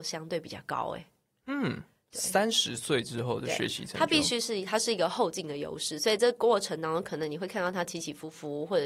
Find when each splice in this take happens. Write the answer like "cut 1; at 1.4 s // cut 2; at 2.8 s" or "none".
none